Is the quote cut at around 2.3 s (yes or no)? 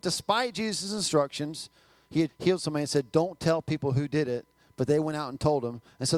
yes